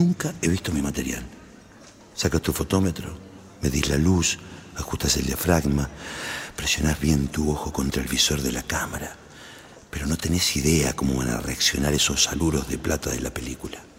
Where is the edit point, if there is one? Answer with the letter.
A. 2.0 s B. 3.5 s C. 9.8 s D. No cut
A